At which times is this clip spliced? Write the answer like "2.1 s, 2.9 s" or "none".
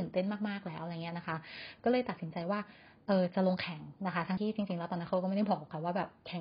4.4 s